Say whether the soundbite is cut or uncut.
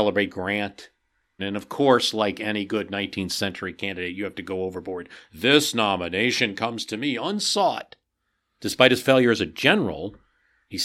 cut